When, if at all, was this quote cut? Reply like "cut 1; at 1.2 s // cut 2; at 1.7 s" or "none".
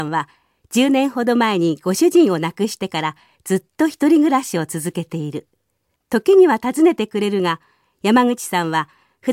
cut 1; at 6.0 s